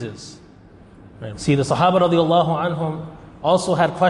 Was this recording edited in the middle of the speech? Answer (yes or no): yes